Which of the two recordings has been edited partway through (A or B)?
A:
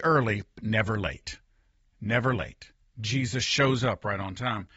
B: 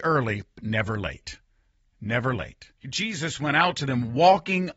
B